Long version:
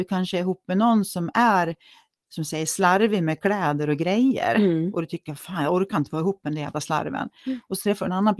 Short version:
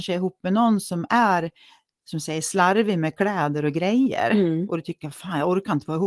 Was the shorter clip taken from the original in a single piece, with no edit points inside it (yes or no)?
yes